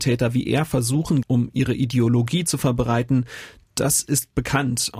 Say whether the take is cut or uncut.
cut